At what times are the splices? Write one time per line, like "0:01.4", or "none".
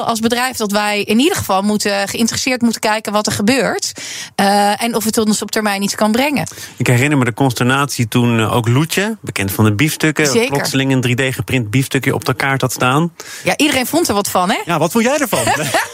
none